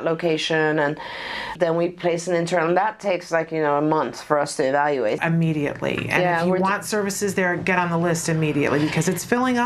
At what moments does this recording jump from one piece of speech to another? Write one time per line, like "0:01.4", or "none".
0:01.6
0:05.2